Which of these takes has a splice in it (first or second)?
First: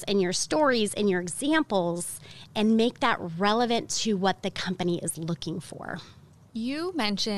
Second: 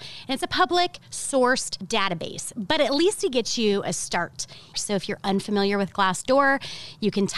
second